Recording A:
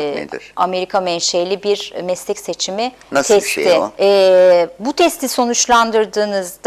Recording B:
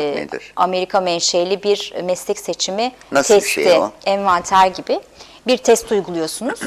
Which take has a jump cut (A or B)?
A